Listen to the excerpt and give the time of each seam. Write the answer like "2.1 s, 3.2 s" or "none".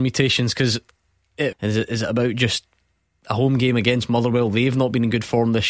1.5 s